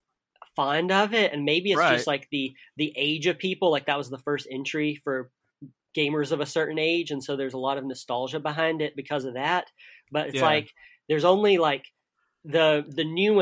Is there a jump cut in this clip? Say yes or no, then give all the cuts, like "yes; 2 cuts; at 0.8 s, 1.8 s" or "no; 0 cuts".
no; 0 cuts